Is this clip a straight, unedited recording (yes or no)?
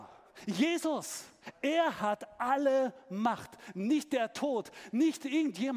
yes